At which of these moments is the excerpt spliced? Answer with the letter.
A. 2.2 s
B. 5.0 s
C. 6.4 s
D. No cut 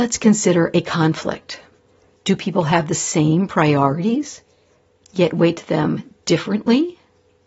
A